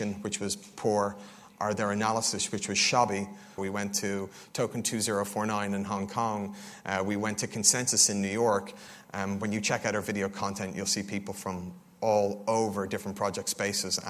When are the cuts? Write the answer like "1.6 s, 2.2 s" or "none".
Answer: 3.6 s, 9.0 s

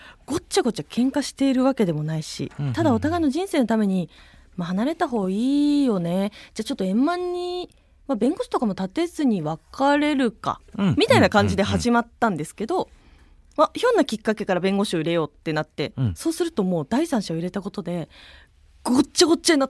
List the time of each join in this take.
none

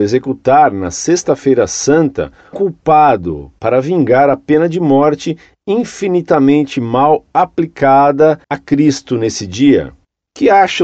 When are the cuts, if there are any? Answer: 2.5 s, 8.4 s

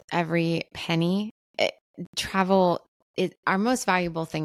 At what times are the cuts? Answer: none

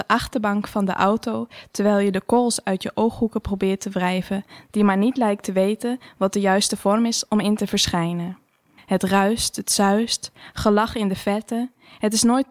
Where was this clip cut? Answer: 4.7 s, 8.8 s

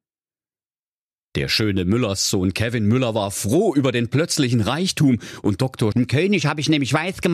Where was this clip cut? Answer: 5.9 s

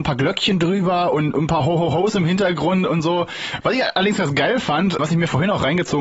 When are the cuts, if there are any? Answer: 3.6 s, 5.0 s

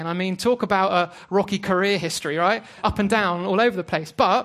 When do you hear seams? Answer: none

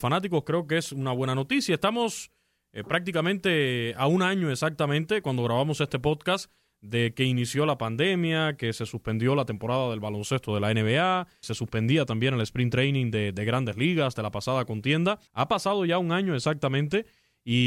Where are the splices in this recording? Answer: 11.4 s, 15.3 s

